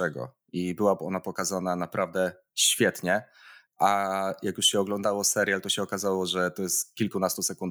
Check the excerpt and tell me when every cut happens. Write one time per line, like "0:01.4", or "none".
none